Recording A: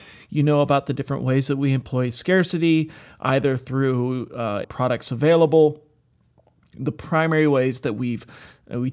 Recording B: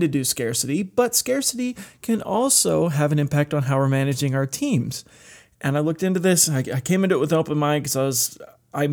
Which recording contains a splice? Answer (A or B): A